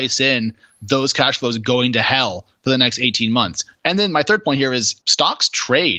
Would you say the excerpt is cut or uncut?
cut